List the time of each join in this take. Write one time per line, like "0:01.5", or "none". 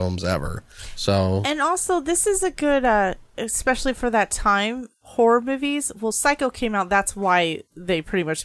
none